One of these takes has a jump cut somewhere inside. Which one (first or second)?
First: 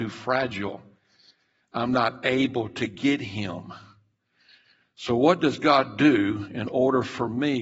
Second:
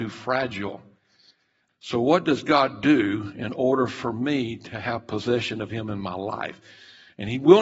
second